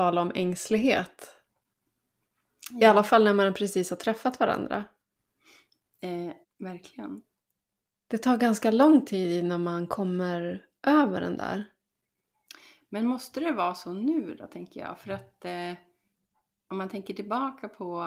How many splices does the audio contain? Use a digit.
1